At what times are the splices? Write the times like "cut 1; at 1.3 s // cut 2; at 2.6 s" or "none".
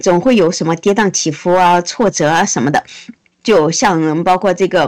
cut 1; at 3.3 s